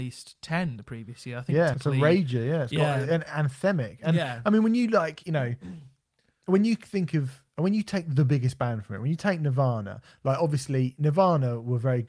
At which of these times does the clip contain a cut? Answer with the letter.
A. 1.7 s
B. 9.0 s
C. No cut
A